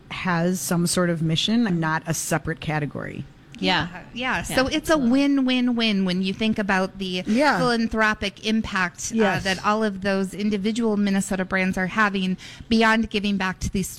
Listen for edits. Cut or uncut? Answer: cut